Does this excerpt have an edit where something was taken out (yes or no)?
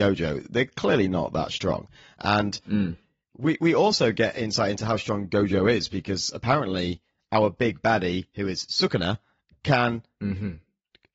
no